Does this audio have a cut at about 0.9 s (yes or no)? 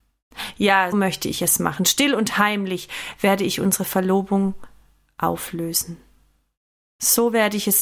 yes